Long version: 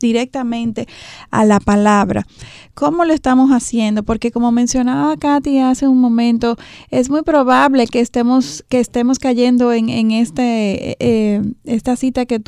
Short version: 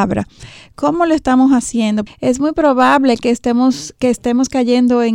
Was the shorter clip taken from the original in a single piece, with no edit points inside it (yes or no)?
no